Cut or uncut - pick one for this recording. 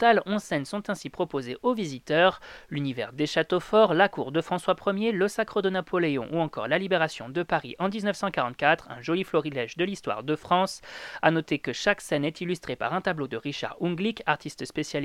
uncut